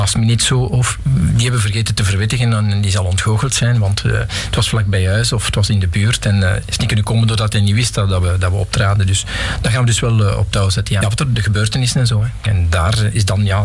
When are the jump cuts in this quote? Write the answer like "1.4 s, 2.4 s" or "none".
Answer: 11.0 s, 12.5 s